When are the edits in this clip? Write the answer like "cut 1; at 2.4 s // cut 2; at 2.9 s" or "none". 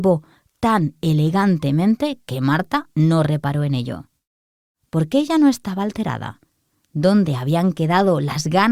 none